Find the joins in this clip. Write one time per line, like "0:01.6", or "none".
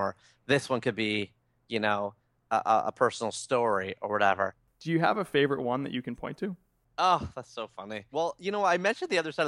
none